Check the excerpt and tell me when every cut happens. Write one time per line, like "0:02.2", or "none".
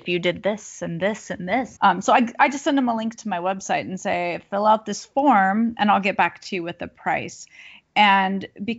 0:01.8